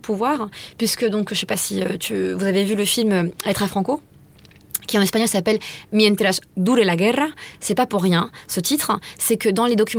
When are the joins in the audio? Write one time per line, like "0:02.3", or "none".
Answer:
none

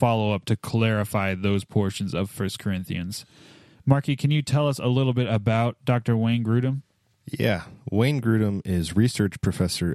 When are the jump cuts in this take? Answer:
none

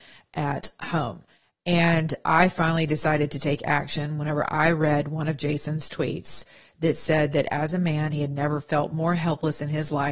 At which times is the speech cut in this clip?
none

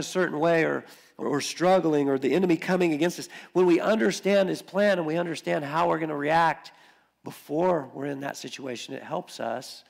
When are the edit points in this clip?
0:01.2

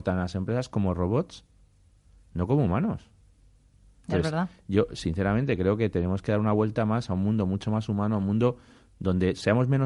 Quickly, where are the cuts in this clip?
none

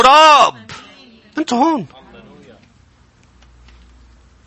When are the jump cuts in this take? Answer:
0:01.3

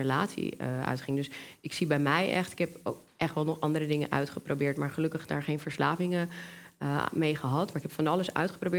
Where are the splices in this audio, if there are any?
none

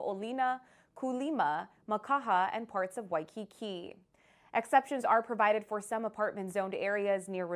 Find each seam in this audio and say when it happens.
none

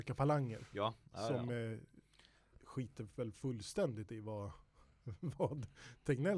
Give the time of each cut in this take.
none

